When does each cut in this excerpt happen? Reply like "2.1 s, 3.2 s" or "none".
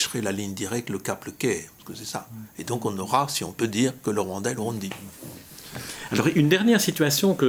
none